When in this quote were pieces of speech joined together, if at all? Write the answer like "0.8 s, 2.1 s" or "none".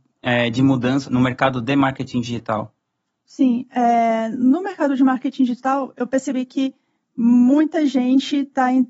1.0 s, 3.2 s

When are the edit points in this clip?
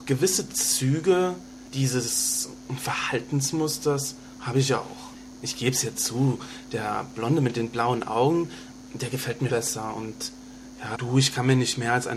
9.5 s, 10.9 s

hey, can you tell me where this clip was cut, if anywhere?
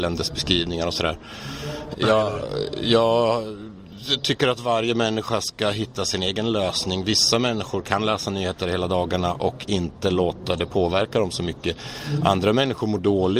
1.9 s

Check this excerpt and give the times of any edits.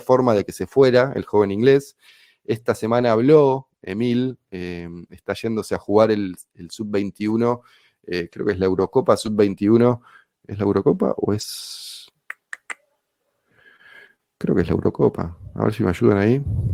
none

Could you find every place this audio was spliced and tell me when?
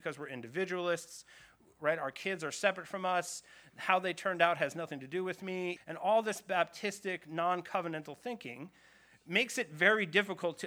5.8 s

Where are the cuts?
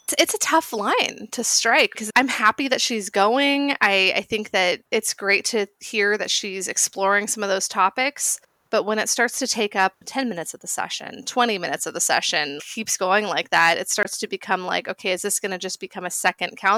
none

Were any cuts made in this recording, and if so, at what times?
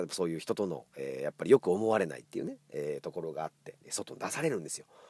3.8 s

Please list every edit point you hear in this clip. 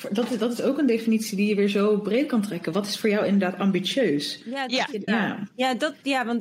5.1 s

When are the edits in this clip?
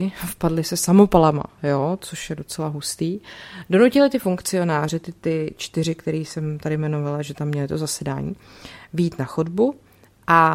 none

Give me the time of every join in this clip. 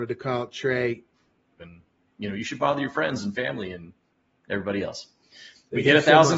1.6 s, 5.3 s

